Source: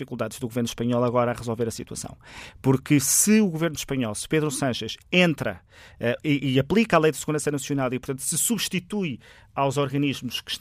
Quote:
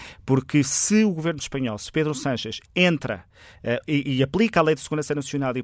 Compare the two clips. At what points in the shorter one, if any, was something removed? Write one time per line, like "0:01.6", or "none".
none